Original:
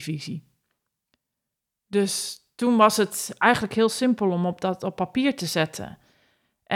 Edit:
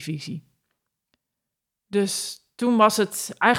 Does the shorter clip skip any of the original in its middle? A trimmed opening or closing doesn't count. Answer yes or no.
no